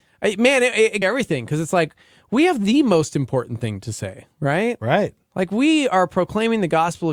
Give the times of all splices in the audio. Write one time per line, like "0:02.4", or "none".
0:01.0